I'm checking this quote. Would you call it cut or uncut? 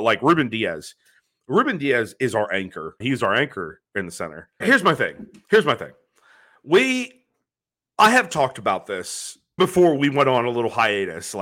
cut